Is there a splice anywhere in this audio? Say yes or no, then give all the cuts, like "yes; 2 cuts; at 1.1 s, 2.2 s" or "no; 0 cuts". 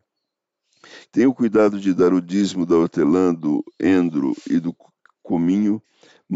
yes; 1 cut; at 1.0 s